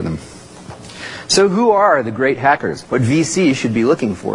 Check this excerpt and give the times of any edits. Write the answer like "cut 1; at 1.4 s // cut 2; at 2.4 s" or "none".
cut 1; at 2.8 s